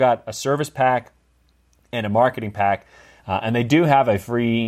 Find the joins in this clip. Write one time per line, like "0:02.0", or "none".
0:03.2